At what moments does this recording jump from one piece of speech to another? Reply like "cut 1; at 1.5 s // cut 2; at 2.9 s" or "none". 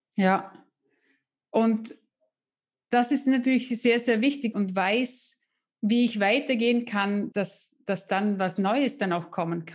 cut 1; at 4.5 s // cut 2; at 7.3 s